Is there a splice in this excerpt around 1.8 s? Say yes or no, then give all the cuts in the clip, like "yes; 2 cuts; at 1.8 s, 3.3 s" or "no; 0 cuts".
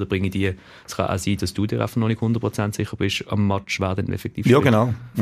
no; 1 cut; at 3.8 s